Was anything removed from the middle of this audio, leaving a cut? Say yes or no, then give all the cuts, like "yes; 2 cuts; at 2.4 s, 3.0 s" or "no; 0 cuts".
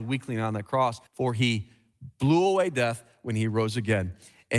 yes; 1 cut; at 1.1 s